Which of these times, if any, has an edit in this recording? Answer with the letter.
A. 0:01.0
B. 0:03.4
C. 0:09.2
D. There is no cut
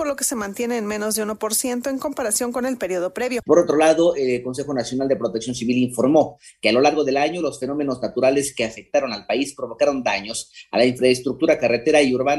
B